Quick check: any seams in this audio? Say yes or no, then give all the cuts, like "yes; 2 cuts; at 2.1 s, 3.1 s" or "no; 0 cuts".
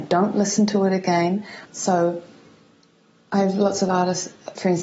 yes; 1 cut; at 1.7 s